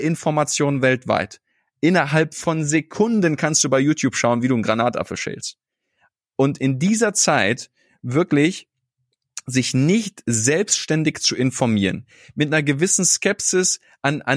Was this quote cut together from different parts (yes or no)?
yes